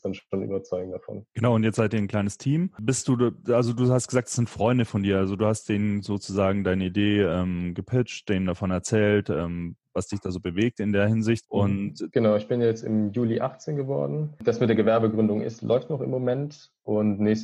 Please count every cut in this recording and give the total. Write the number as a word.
one